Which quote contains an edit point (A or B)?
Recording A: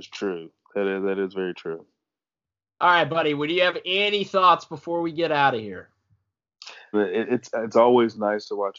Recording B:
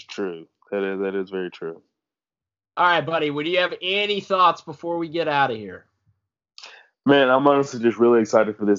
A